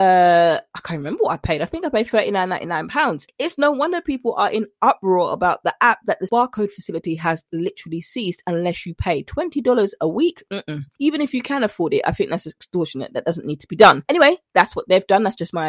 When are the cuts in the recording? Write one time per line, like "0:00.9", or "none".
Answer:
none